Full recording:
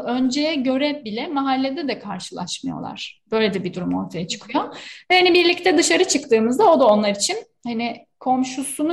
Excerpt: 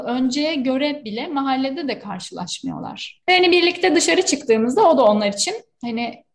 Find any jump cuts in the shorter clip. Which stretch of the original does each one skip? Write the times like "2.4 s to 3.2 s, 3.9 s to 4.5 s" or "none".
3.2 s to 5.1 s